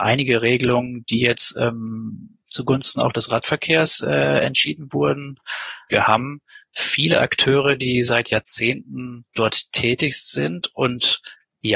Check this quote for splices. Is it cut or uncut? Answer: cut